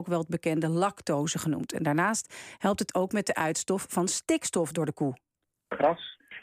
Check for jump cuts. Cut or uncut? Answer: uncut